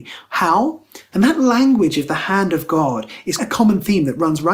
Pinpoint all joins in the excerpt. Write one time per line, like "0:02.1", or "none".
0:01.1
0:03.4